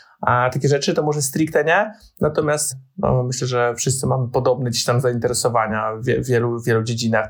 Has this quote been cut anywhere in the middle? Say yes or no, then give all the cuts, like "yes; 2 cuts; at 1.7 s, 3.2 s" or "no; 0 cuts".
no; 0 cuts